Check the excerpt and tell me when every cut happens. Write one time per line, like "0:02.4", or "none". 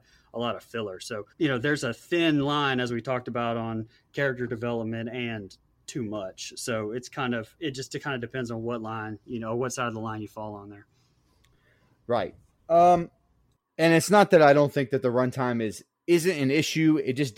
0:01.3